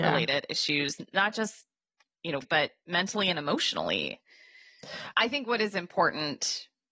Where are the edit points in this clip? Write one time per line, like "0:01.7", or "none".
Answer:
0:02.4
0:05.1